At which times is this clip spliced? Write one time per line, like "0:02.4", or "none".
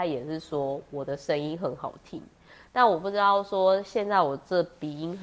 0:02.7